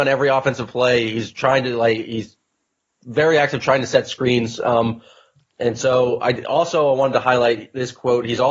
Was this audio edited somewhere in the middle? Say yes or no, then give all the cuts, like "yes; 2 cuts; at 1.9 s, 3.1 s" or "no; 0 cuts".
no; 0 cuts